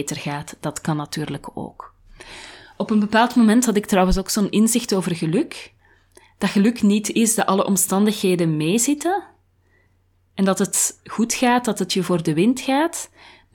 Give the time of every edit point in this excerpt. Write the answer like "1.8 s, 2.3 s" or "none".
none